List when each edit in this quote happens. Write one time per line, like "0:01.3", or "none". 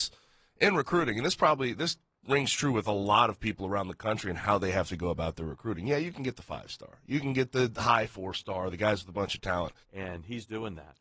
0:09.8